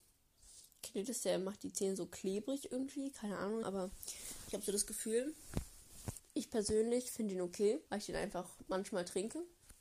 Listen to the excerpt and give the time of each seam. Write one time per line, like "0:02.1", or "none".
0:03.6
0:06.2
0:07.9